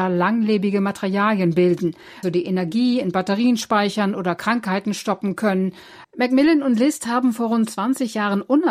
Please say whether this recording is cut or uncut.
cut